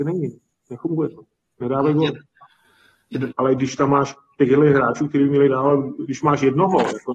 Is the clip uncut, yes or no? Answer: no